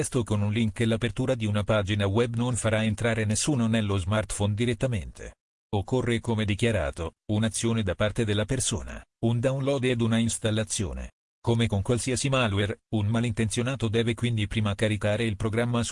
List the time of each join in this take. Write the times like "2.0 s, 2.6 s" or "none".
none